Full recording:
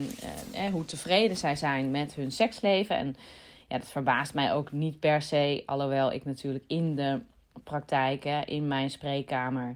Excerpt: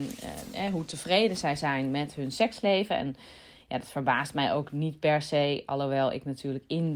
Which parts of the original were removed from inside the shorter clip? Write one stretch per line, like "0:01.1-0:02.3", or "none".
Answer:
none